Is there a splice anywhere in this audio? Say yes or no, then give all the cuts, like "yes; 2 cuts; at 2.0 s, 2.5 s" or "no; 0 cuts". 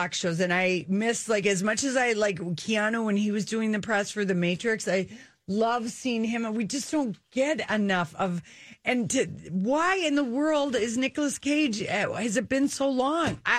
no; 0 cuts